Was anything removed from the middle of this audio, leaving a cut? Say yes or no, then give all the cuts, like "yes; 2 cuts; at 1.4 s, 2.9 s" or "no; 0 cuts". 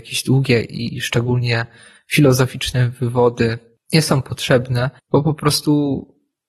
yes; 1 cut; at 5.0 s